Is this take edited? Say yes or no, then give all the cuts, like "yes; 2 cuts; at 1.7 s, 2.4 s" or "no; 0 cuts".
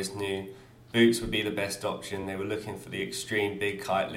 no; 0 cuts